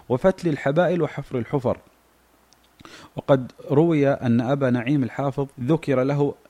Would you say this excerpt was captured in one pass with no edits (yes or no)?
no